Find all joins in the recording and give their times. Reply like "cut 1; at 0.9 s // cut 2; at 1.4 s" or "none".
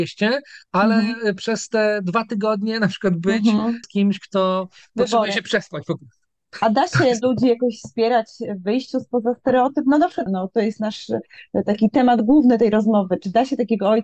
cut 1; at 3.8 s // cut 2; at 10.3 s